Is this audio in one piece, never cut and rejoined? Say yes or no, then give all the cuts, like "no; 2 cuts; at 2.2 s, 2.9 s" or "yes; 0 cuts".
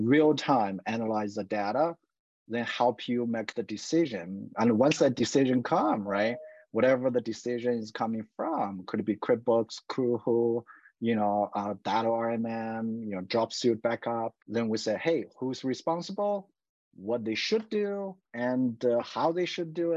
no; 2 cuts; at 14.4 s, 18.2 s